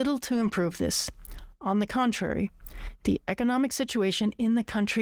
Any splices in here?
no; 0 cuts

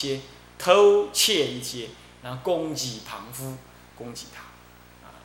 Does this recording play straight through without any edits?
no; 1 cut; at 3.9 s

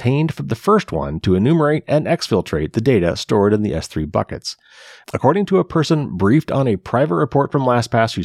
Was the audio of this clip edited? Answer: no; 0 cuts

